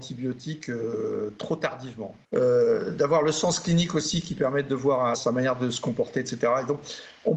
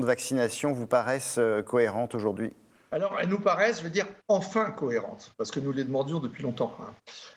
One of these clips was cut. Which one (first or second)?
first